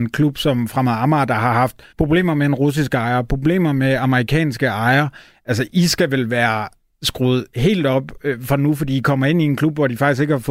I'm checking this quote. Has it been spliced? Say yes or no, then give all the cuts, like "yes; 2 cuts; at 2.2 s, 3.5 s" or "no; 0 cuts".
yes; 1 cut; at 1.9 s